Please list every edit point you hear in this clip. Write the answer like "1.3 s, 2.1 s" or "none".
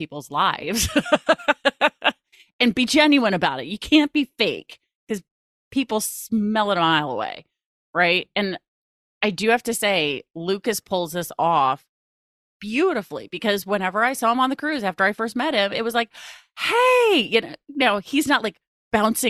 none